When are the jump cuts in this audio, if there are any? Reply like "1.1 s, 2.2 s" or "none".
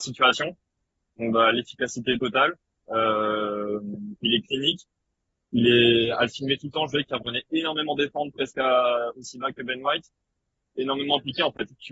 none